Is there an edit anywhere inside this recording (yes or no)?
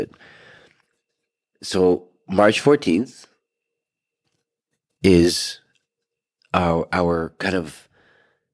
no